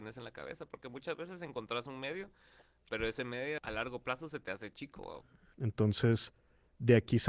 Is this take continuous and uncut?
no; 2 cuts; at 3.6 s, 5.5 s

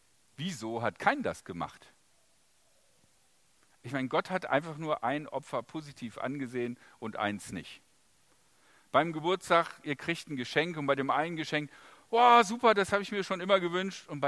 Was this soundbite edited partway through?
no; 0 cuts

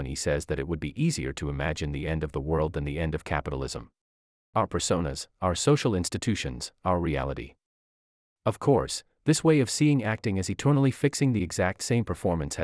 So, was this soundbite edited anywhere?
yes; 1 cut; at 4.4 s

